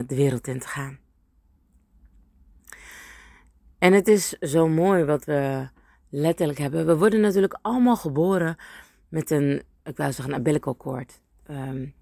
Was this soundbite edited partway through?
no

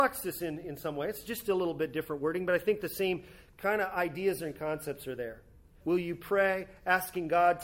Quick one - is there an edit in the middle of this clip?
yes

